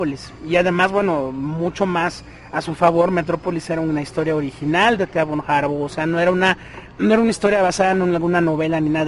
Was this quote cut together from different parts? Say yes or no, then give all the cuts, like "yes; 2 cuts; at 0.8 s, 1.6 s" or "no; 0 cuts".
no; 0 cuts